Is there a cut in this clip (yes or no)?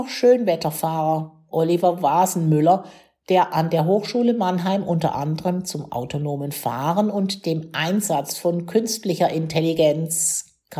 yes